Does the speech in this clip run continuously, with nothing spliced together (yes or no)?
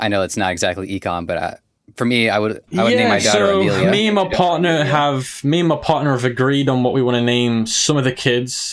yes